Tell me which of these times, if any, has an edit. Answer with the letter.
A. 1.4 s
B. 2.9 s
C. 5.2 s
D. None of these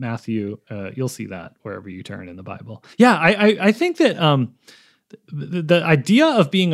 B